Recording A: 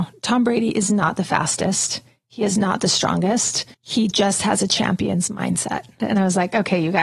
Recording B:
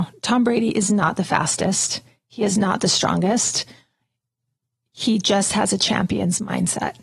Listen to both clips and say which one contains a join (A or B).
A